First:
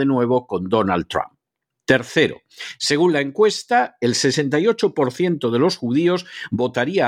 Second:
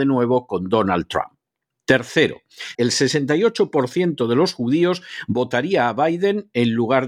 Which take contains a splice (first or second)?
second